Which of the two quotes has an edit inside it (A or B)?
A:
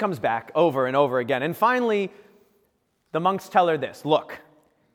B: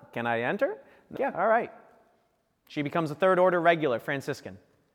B